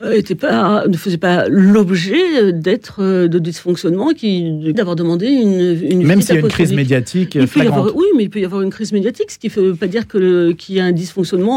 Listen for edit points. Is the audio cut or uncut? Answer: cut